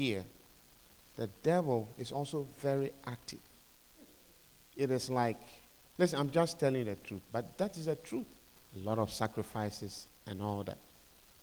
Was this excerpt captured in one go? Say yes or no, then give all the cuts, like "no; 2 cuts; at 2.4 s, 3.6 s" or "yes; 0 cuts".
no; 2 cuts; at 7.3 s, 8.7 s